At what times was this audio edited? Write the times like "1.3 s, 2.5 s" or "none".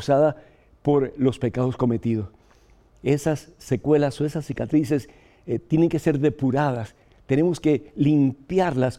none